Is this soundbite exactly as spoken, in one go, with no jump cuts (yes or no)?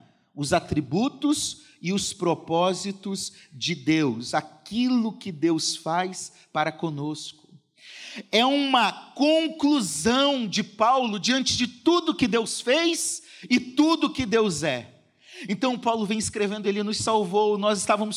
yes